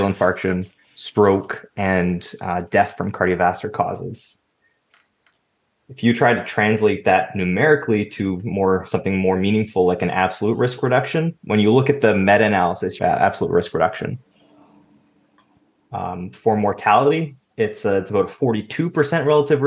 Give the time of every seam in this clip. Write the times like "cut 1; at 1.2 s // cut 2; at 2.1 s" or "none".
cut 1; at 13.0 s